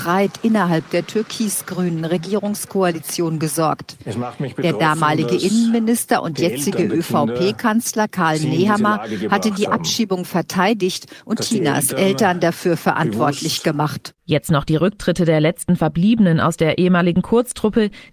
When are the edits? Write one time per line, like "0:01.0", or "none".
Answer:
0:14.2